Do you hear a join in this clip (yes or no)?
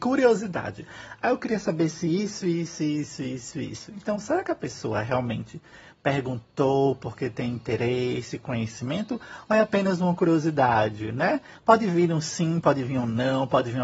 yes